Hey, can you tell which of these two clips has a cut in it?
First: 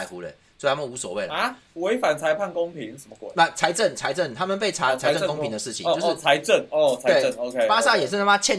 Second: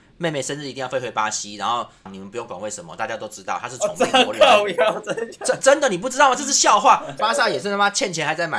second; 2 cuts; at 2.1 s, 7.2 s

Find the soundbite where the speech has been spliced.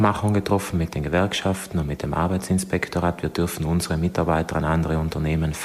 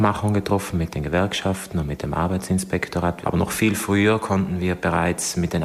second; 1 cut; at 3.2 s

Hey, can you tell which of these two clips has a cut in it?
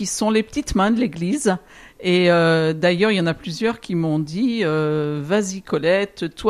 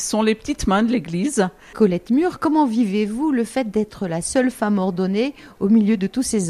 second; 1 cut; at 1.7 s

